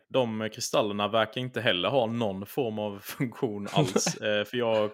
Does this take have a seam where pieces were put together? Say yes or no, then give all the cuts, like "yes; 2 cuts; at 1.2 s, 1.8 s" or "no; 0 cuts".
no; 0 cuts